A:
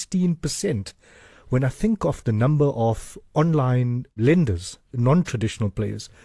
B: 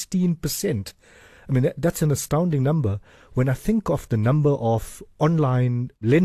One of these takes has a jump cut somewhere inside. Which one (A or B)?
A